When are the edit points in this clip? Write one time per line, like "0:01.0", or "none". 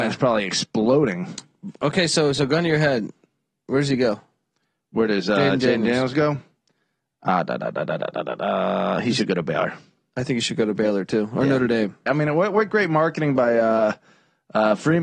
0:12.1